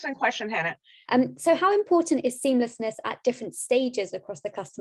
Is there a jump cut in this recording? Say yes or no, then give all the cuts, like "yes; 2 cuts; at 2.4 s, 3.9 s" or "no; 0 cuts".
yes; 1 cut; at 1.1 s